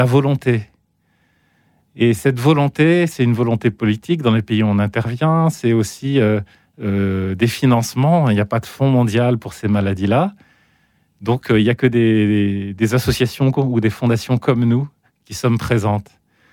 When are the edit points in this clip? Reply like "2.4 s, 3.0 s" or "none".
none